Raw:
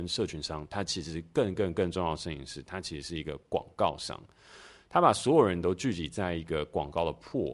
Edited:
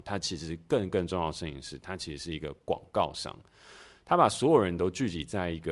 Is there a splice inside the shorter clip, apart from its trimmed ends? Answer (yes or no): yes